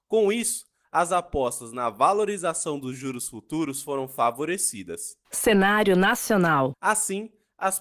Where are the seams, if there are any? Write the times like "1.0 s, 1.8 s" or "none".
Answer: 5.2 s, 6.7 s